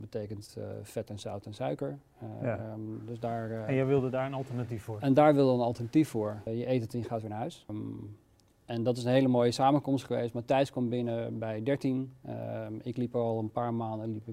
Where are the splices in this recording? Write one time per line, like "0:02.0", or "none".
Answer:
0:06.5
0:07.7